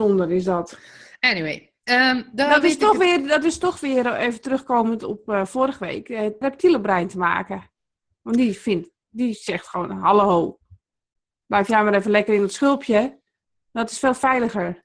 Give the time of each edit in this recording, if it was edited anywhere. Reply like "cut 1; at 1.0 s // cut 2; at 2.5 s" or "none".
cut 1; at 6.4 s